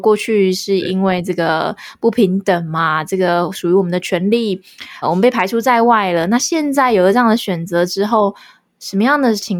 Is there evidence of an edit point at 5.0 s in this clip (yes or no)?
yes